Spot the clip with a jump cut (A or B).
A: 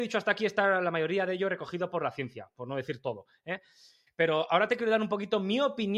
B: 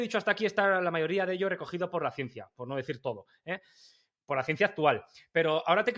A